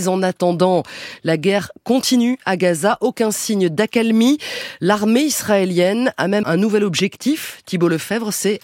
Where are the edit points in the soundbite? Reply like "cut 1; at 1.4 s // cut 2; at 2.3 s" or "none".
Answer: cut 1; at 6.4 s